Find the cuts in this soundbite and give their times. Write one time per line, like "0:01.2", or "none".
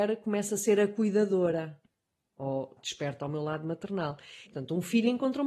0:02.8
0:04.5